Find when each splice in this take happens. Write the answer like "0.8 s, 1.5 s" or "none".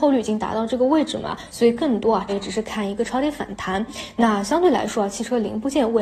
2.3 s